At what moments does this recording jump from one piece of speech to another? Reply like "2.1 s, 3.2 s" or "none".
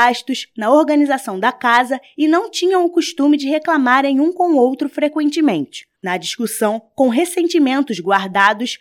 5.9 s